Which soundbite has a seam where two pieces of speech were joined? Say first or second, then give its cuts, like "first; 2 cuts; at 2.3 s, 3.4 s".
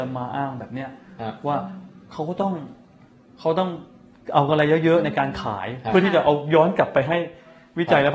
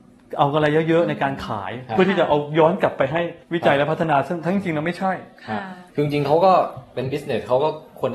second; 2 cuts; at 3.4 s, 5.9 s